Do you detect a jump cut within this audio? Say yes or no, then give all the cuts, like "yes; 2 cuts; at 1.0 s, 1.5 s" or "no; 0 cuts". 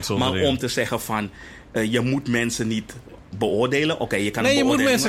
no; 0 cuts